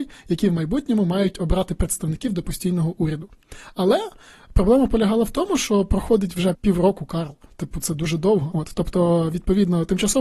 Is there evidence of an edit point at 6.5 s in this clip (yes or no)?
yes